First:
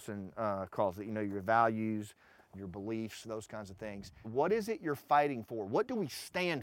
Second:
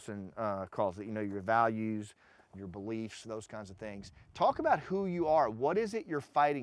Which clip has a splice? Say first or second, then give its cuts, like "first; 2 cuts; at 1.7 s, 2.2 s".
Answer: first; 1 cut; at 4.2 s